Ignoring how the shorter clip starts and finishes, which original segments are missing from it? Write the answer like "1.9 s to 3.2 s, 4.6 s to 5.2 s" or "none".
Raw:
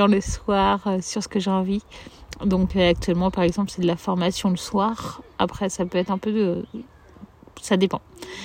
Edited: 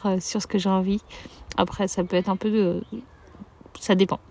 2.4 s to 5.4 s